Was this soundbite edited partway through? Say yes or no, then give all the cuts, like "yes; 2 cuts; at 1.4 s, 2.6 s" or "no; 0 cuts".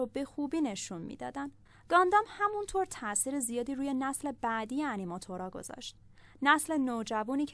no; 0 cuts